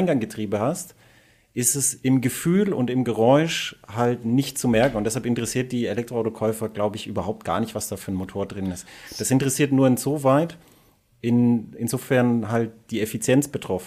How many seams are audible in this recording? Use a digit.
0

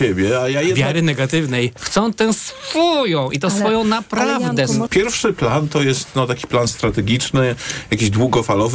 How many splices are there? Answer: 2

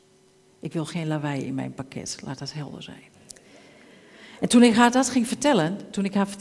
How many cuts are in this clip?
1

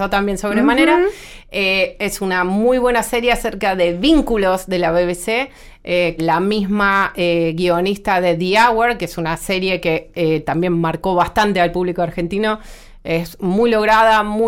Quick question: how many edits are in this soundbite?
1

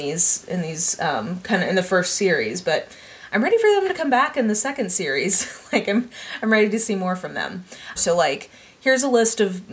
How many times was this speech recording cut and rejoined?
1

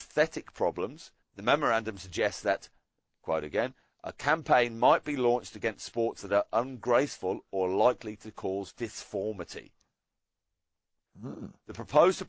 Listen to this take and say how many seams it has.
2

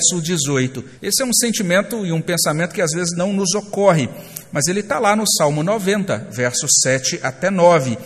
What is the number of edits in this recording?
1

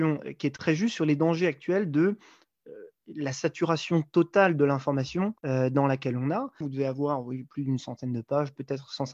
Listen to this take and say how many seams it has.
2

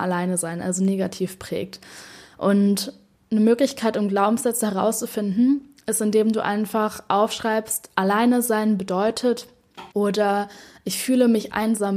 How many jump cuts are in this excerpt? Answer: 1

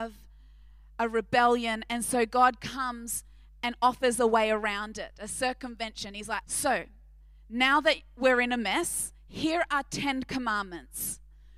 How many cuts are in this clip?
1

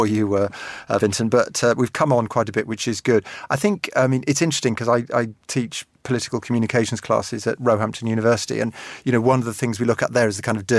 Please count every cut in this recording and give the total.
0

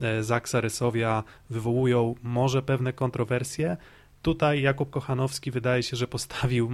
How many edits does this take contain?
0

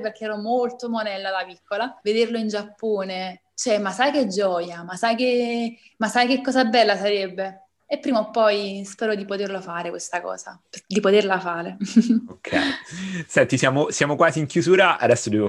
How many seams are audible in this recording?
0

